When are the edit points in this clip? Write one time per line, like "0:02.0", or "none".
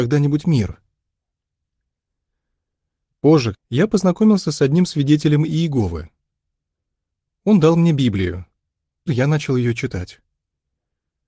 0:03.5
0:09.1